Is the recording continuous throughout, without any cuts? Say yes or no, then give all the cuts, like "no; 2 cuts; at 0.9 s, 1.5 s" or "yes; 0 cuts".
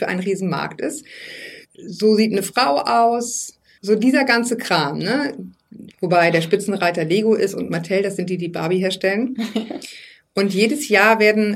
no; 3 cuts; at 1.6 s, 3.8 s, 5.9 s